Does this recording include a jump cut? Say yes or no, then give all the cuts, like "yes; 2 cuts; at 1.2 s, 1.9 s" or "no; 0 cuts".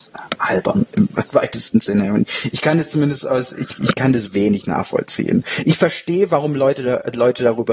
no; 0 cuts